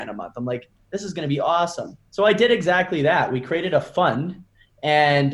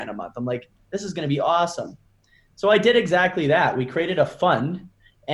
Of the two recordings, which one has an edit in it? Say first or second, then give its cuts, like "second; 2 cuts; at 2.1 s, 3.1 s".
first; 1 cut; at 2.1 s